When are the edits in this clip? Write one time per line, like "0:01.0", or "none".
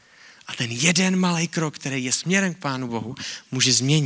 none